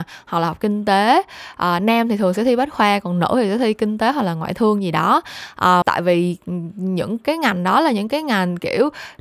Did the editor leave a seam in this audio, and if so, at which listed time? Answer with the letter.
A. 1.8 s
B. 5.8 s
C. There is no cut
B